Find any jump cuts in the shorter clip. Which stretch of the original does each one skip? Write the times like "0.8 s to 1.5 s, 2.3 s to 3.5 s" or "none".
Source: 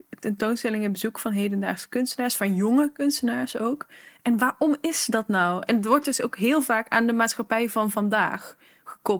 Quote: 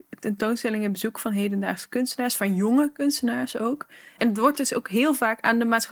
4.2 s to 5.7 s